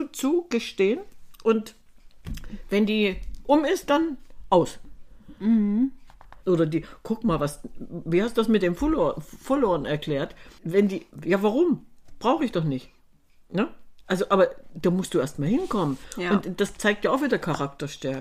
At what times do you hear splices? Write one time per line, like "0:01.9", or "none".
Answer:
0:06.4

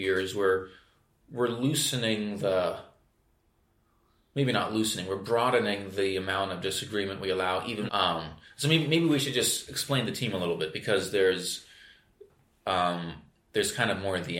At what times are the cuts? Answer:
0:07.9

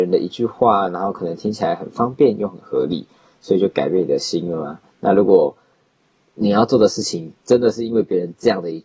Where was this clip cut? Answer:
none

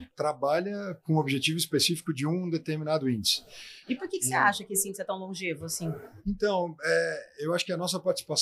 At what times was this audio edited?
0:03.8

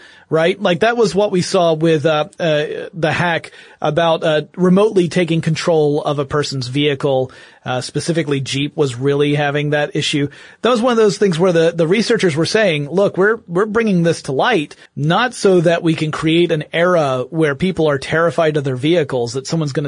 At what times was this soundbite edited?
0:14.9

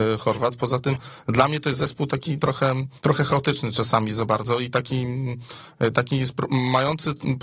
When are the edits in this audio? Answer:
0:03.0

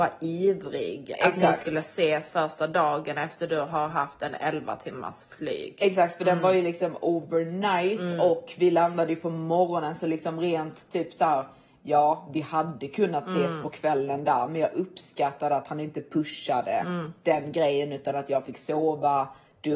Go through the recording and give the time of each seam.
none

